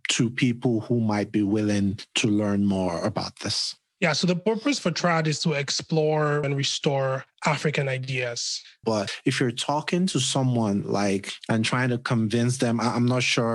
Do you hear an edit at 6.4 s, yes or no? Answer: yes